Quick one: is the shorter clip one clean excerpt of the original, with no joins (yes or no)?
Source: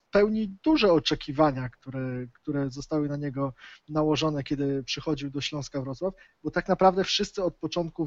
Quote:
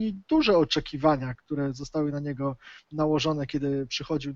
no